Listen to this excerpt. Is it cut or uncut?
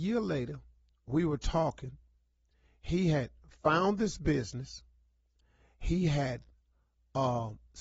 uncut